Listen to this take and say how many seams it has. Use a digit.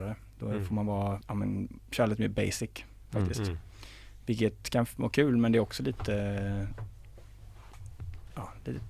1